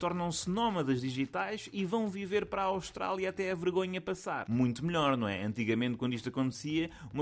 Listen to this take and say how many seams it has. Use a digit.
0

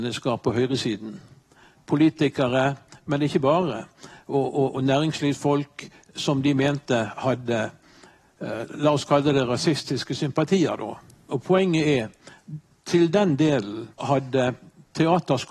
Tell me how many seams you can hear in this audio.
3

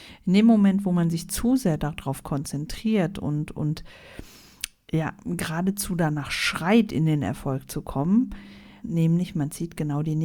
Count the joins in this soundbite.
1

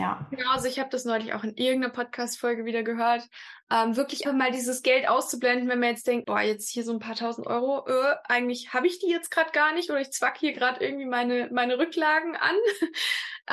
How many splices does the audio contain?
2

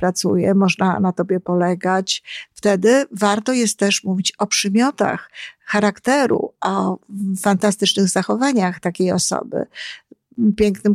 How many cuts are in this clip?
1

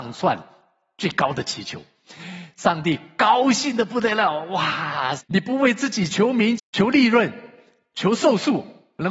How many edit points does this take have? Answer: 2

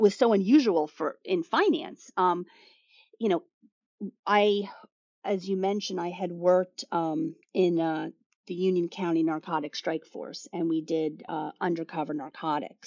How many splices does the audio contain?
1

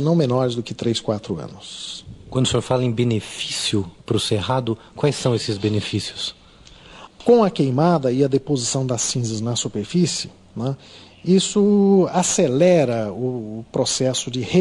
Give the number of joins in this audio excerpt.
1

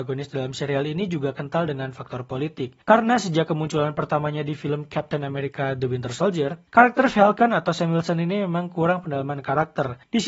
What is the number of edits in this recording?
1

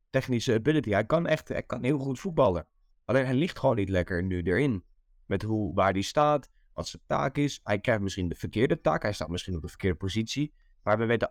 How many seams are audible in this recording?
0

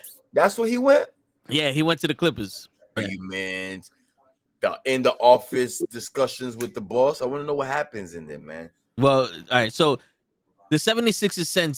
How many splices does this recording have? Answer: 2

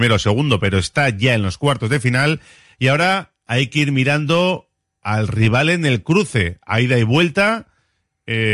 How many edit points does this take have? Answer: 0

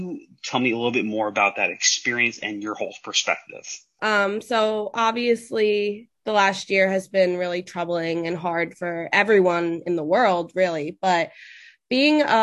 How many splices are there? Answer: 1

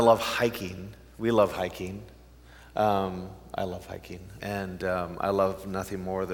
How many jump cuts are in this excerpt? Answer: 1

